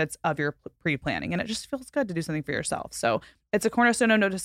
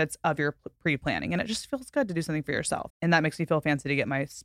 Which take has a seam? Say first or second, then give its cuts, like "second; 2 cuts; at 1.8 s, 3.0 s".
second; 1 cut; at 2.9 s